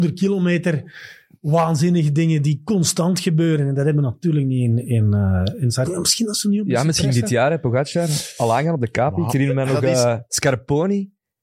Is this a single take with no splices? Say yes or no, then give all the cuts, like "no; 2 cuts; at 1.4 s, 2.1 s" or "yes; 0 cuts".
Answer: no; 1 cut; at 5.8 s